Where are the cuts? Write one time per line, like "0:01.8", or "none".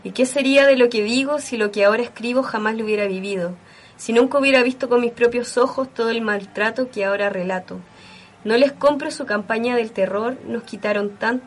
0:08.3